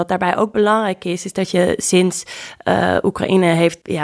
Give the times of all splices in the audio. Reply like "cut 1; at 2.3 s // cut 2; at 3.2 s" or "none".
none